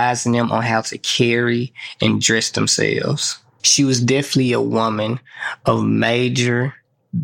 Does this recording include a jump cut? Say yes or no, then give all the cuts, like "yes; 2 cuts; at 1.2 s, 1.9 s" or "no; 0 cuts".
yes; 1 cut; at 3.6 s